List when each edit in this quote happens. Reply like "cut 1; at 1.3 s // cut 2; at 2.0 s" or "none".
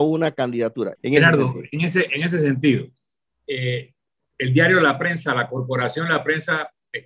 cut 1; at 0.9 s